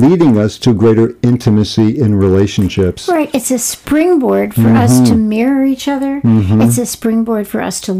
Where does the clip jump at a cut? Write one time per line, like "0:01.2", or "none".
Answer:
none